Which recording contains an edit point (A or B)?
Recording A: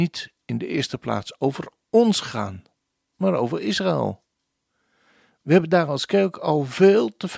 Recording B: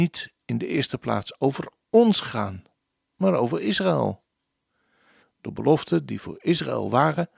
B